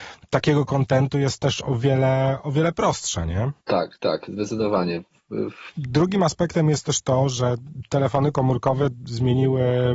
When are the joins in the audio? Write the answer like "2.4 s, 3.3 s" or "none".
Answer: 3.6 s, 5.7 s